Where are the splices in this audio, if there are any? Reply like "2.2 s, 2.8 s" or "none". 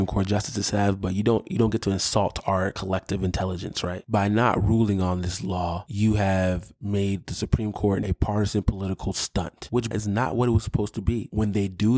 8.0 s, 9.9 s